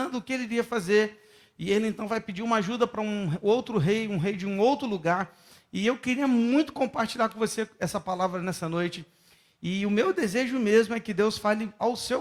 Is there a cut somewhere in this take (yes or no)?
no